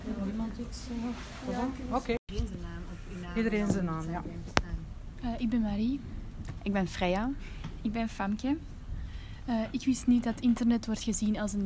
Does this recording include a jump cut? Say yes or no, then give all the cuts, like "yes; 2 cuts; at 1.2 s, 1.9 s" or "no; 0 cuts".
no; 0 cuts